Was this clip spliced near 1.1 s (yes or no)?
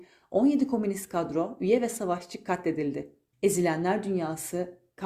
no